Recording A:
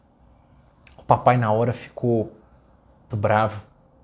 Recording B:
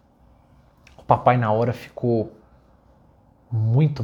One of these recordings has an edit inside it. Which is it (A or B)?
A